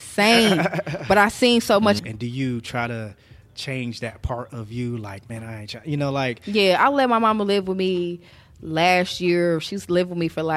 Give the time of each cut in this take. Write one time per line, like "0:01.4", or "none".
0:02.0